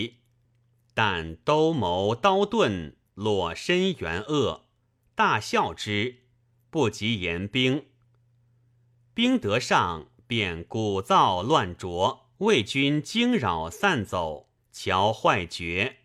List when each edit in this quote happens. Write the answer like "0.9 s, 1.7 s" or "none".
12.3 s, 14.6 s